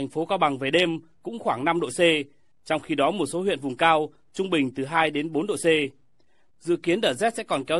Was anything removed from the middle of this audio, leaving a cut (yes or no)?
yes